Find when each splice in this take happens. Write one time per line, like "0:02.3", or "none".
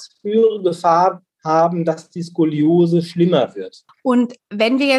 0:03.9